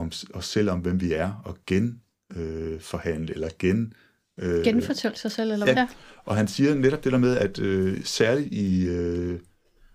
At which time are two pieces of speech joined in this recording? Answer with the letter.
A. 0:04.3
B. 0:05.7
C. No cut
B